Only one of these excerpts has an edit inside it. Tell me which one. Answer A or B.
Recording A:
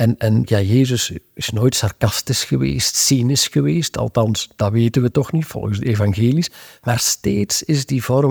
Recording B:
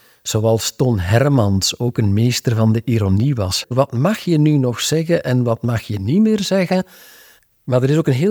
B